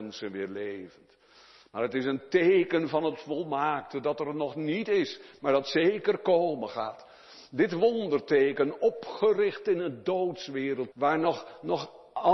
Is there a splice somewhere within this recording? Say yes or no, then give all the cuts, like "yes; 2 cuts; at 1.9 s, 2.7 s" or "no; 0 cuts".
yes; 1 cut; at 10.9 s